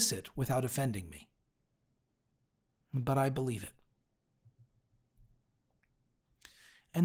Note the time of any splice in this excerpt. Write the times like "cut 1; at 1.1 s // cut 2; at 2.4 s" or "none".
none